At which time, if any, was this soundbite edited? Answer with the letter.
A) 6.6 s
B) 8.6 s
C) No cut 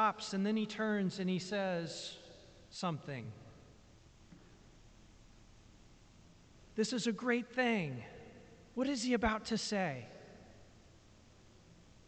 A